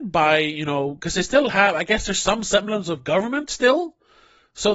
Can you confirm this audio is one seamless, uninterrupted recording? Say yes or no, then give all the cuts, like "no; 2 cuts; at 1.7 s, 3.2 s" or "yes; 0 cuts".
yes; 0 cuts